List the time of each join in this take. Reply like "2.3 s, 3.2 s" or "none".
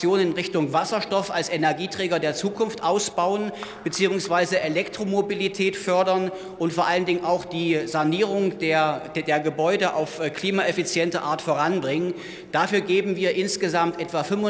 none